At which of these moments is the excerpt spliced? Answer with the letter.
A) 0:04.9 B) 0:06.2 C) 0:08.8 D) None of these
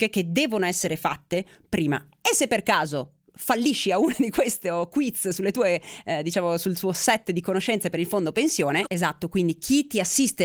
C